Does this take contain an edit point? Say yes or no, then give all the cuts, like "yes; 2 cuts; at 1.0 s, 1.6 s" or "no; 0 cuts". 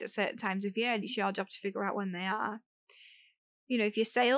no; 0 cuts